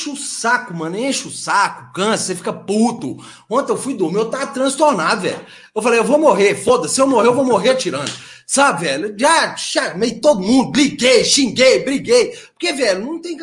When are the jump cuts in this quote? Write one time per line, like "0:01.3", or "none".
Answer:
none